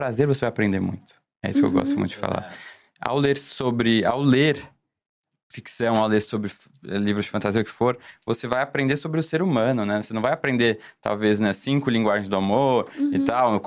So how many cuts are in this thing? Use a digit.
0